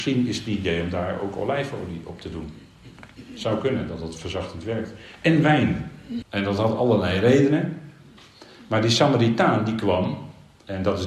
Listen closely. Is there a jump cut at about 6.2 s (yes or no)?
yes